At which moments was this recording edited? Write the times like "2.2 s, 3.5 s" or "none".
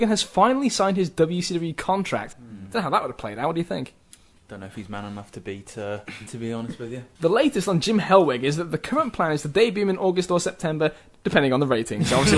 2.3 s, 6.3 s